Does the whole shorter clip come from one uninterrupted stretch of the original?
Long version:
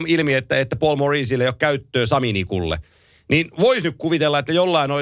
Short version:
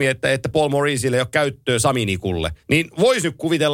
no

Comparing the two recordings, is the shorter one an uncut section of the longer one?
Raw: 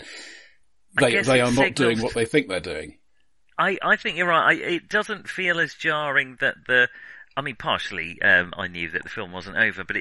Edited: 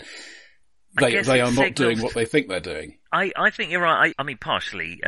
no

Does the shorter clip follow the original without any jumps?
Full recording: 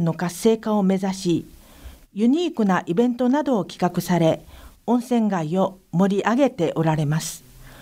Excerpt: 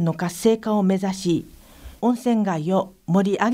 no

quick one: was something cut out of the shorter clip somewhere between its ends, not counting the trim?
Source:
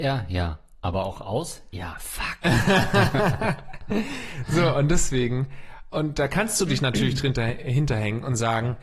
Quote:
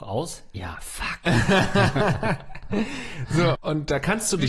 yes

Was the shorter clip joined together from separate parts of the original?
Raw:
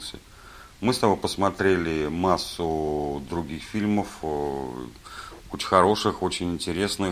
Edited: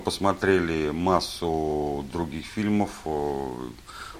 no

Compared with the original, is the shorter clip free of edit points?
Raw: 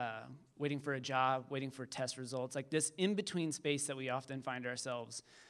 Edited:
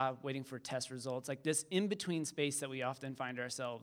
yes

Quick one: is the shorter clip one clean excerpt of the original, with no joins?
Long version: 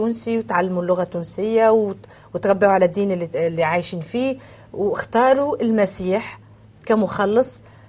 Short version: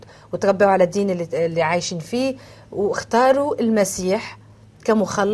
yes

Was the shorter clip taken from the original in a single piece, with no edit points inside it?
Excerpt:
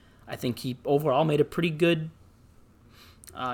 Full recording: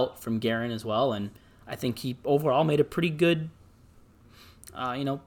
yes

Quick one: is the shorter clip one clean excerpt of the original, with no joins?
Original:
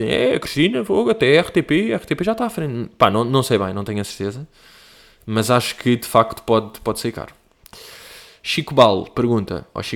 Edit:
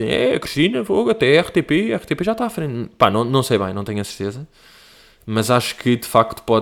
yes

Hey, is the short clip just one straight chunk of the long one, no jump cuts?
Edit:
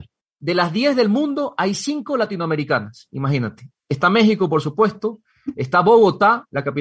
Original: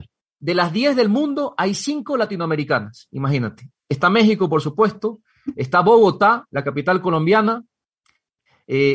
yes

